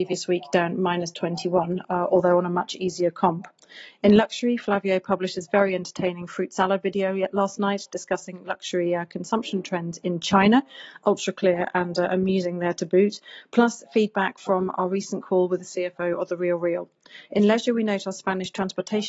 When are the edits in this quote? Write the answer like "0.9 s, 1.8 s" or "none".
none